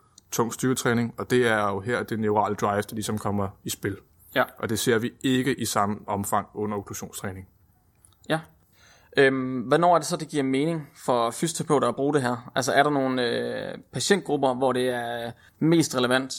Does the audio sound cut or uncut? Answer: uncut